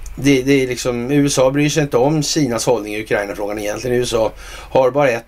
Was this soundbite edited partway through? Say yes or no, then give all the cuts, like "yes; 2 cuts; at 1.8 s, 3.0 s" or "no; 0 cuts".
no; 0 cuts